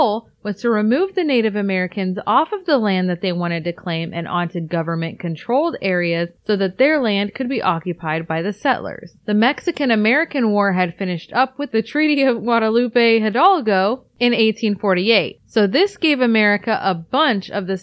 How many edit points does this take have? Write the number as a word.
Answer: zero